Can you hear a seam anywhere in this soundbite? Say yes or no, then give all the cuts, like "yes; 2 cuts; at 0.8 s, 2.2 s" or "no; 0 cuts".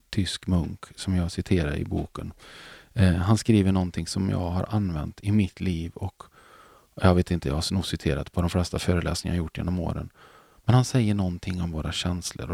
no; 0 cuts